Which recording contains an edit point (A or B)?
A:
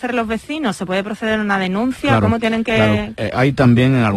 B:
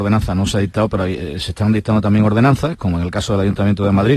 A